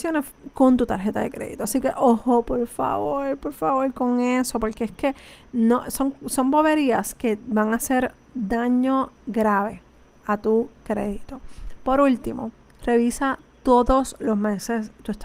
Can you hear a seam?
no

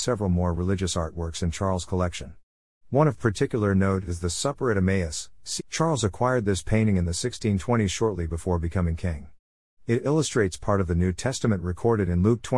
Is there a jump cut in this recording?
yes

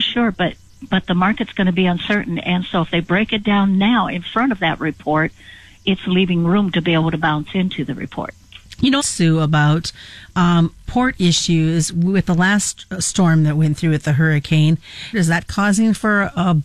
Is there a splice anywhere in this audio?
yes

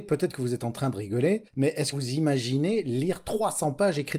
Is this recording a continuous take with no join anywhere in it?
no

